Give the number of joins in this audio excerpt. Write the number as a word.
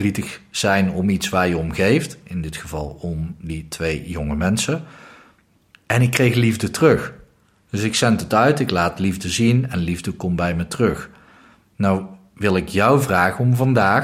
zero